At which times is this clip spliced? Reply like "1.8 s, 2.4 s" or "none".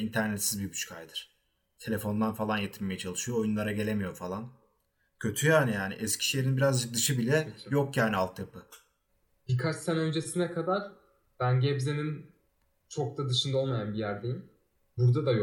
none